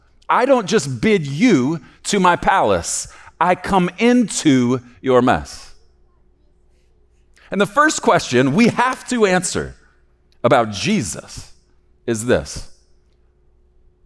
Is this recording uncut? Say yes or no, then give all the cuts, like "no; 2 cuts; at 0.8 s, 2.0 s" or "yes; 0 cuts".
yes; 0 cuts